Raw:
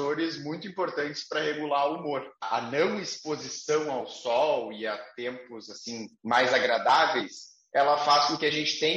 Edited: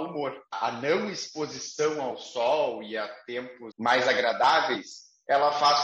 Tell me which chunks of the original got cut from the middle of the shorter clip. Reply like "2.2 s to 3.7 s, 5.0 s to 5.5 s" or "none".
5.6 s to 6.2 s